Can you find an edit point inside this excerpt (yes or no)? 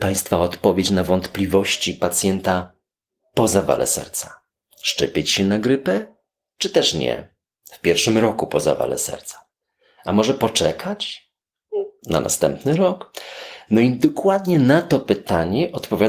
yes